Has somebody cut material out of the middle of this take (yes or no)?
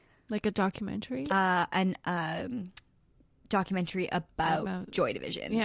yes